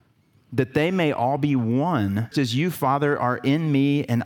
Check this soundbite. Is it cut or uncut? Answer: cut